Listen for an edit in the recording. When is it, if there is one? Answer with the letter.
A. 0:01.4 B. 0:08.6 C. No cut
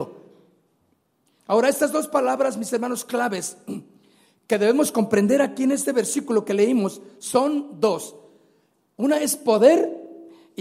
A